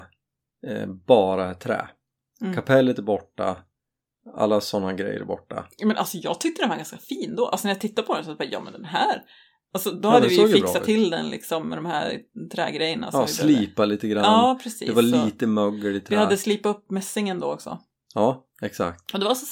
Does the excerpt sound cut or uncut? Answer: uncut